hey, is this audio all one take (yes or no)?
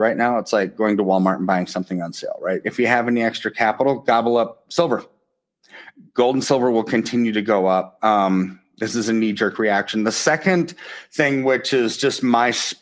no